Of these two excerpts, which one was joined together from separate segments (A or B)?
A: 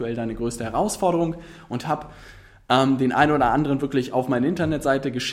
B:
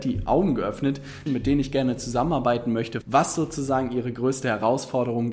B